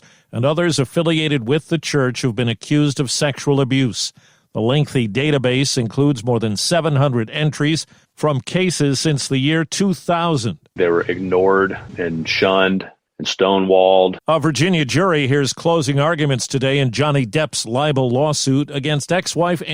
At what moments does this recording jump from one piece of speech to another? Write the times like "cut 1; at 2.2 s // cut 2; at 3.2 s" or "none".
cut 1; at 10.7 s // cut 2; at 14.2 s